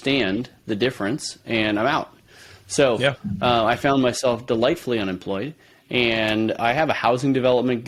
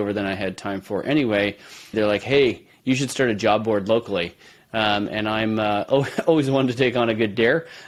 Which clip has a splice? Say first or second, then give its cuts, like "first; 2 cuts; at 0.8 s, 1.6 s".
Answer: second; 1 cut; at 1.9 s